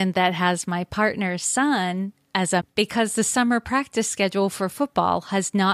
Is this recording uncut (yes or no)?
no